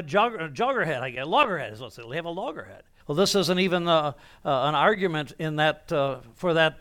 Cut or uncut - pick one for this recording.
cut